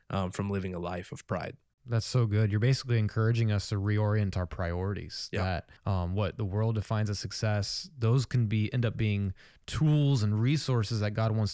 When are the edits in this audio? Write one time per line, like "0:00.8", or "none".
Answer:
0:05.8